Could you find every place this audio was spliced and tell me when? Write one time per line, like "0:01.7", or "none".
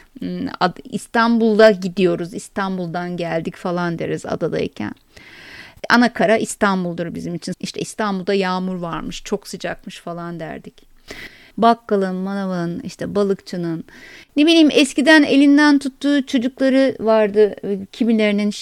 0:07.5
0:11.5